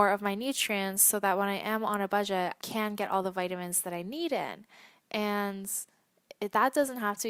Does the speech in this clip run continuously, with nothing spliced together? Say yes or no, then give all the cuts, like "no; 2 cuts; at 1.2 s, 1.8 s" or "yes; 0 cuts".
no; 1 cut; at 2.6 s